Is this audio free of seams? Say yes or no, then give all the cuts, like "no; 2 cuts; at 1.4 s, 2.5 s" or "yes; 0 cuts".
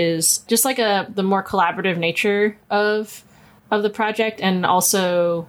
yes; 0 cuts